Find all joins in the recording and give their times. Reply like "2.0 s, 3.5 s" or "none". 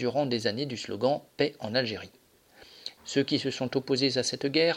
1.3 s, 3.0 s